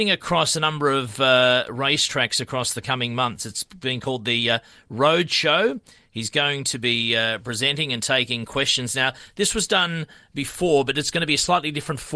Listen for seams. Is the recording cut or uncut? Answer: uncut